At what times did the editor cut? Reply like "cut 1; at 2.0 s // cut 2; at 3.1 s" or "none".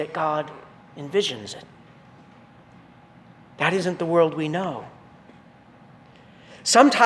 none